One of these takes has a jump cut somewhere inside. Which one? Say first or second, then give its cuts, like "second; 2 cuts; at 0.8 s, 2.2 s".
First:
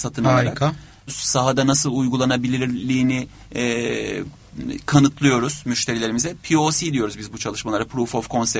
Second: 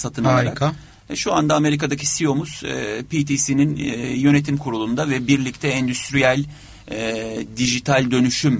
first; 1 cut; at 1.1 s